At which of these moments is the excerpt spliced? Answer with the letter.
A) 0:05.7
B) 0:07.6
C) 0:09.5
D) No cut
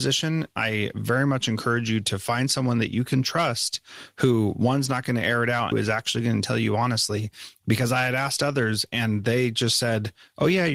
A